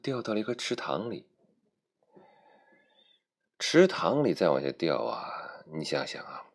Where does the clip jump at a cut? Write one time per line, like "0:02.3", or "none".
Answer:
none